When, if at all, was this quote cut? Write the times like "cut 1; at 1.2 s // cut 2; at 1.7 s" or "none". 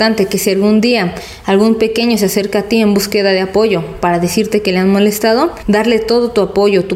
cut 1; at 5.6 s